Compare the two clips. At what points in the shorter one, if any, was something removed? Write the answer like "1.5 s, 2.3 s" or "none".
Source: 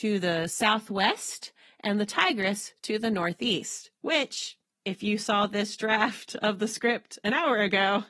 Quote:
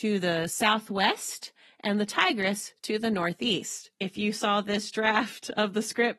3.9 s